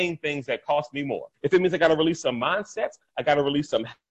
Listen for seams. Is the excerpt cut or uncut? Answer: cut